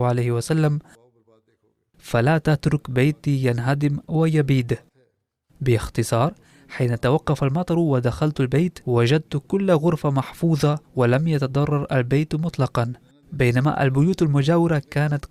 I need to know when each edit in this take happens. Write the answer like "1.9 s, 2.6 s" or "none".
8.8 s, 10.8 s